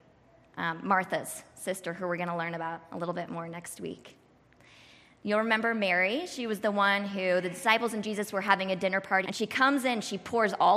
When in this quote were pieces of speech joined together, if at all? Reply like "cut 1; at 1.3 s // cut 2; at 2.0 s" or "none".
cut 1; at 9.2 s